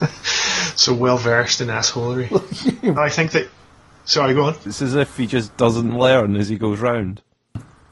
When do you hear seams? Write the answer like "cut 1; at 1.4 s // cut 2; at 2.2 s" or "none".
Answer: cut 1; at 3.0 s // cut 2; at 4.7 s